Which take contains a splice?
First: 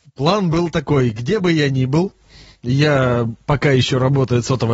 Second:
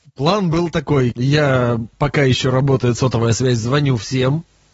second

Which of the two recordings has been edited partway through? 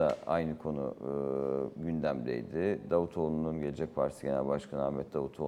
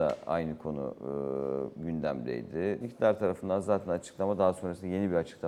second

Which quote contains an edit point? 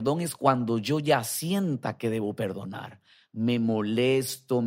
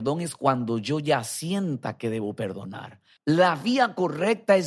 second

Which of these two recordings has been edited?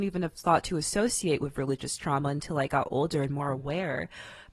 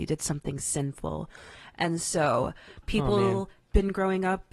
second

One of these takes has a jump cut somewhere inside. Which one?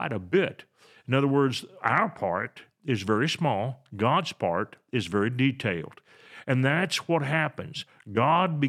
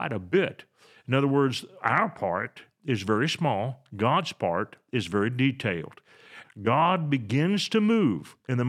second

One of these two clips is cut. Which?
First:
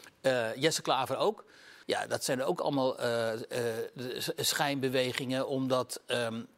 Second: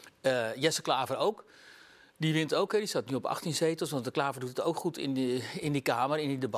first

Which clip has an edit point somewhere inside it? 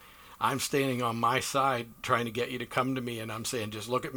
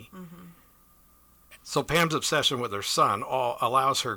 second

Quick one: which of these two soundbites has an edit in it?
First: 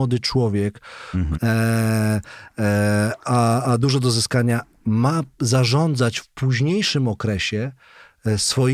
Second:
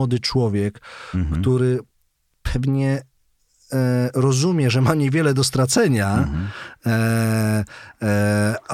first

